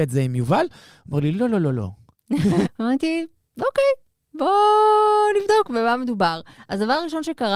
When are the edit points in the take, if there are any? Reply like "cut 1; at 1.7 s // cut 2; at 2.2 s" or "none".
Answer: cut 1; at 2.6 s